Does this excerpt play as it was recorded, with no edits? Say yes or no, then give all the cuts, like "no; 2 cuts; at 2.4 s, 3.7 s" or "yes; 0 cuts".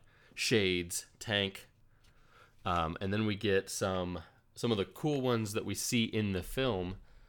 yes; 0 cuts